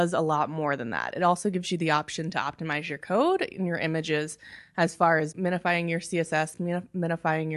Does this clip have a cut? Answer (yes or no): no